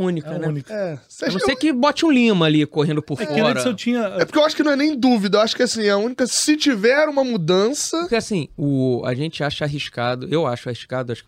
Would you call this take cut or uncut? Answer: uncut